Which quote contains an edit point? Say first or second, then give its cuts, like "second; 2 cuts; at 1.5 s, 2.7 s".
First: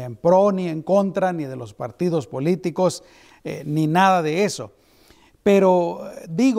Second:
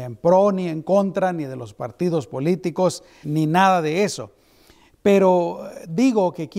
second; 1 cut; at 3.2 s